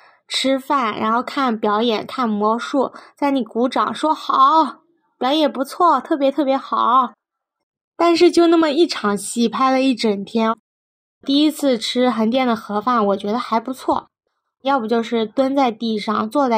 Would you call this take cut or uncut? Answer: uncut